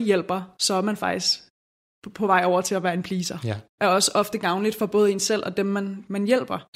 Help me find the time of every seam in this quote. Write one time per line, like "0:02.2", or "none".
0:03.8